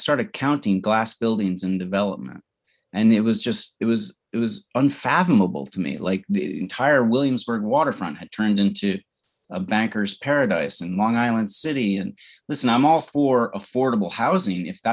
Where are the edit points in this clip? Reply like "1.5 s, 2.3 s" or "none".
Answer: none